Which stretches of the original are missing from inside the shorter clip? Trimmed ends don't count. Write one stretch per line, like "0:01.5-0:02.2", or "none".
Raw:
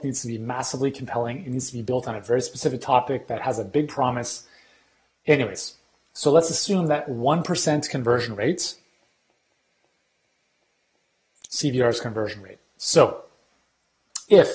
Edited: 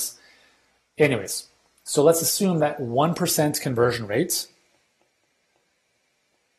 none